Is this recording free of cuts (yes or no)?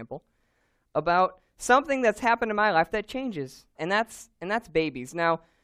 no